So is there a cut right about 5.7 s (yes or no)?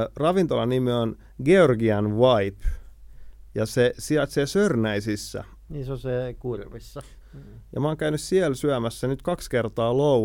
yes